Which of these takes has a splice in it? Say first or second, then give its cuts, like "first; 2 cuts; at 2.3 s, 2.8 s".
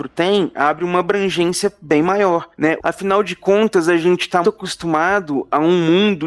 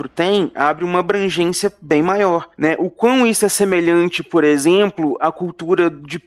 first; 2 cuts; at 2.8 s, 4.4 s